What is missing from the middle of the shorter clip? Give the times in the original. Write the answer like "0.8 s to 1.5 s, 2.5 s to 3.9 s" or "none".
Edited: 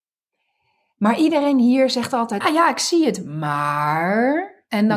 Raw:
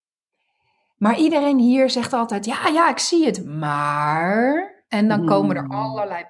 2.4 s to 2.6 s